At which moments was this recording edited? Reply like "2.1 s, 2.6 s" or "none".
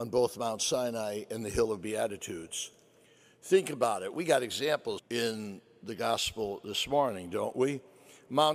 5.0 s

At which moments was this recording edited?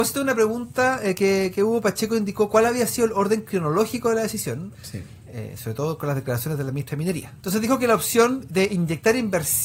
4.7 s, 7.4 s

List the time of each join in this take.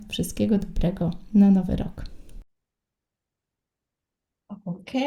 none

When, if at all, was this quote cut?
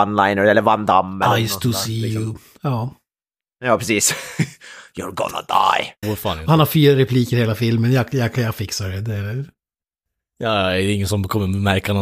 6.0 s

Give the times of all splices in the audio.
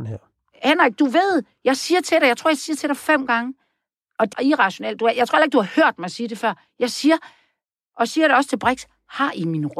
4.3 s

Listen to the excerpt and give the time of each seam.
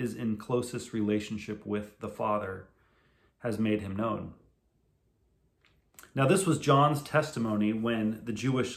none

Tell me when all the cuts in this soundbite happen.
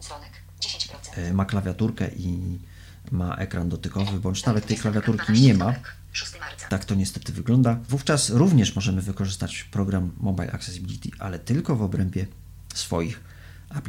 6.7 s, 7.9 s

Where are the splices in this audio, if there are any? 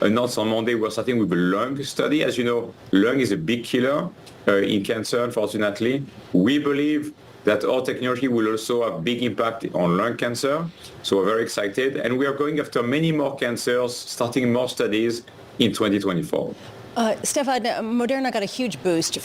none

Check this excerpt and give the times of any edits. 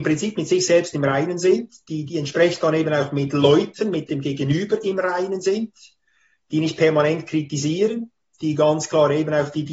none

